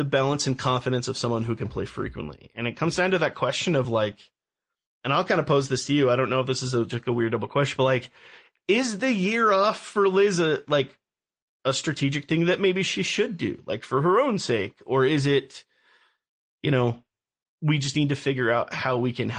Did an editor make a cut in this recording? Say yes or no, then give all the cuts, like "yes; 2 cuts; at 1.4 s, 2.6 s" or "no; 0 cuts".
no; 0 cuts